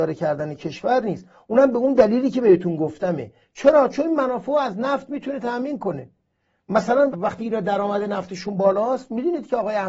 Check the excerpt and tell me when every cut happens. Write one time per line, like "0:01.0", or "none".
0:07.1

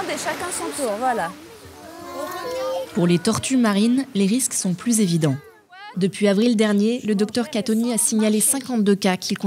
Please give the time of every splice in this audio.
0:05.9

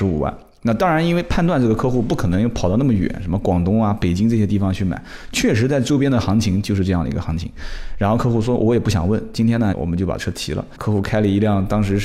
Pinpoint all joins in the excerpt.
0:09.7
0:10.7

